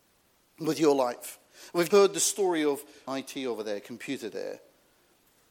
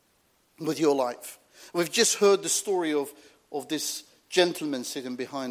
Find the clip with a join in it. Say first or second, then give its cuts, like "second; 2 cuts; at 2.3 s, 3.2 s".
first; 2 cuts; at 1.9 s, 3.1 s